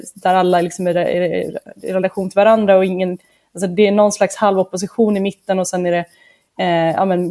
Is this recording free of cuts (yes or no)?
yes